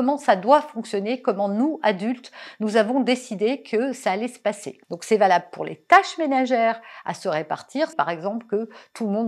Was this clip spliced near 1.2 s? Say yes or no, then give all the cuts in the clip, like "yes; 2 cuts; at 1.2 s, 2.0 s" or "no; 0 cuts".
no; 2 cuts; at 4.8 s, 7.9 s